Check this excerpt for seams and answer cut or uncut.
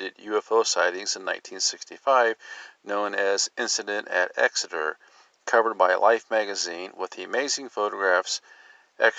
uncut